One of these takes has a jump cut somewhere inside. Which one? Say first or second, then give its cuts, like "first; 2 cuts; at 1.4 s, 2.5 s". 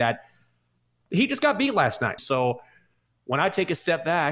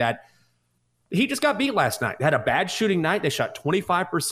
first; 1 cut; at 2.2 s